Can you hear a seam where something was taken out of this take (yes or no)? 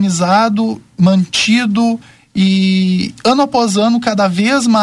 no